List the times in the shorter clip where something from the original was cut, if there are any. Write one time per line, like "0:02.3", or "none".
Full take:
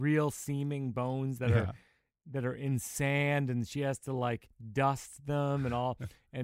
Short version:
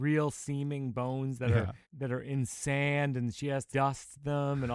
0:01.8
0:03.7